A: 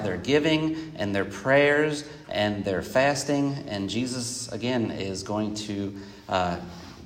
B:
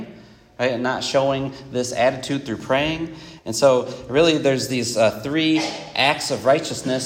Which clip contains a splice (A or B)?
B